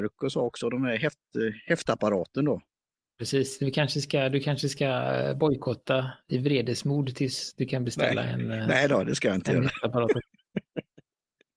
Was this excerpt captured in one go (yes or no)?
yes